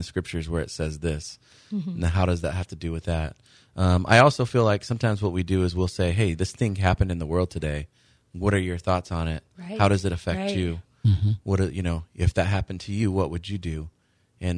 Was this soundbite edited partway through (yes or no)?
no